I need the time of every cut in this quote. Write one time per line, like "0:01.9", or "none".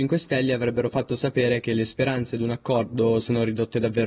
none